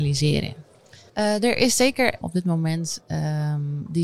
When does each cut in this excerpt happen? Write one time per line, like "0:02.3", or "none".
0:01.1
0:02.2